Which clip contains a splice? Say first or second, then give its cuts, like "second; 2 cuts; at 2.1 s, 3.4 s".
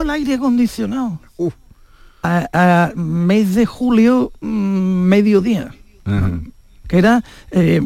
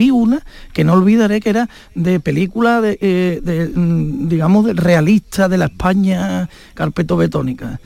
first; 1 cut; at 6.8 s